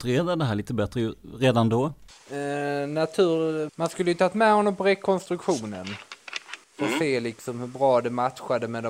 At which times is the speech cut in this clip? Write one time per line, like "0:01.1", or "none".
0:03.7
0:06.6